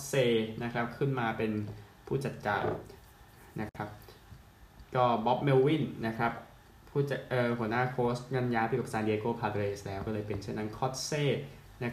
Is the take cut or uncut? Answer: uncut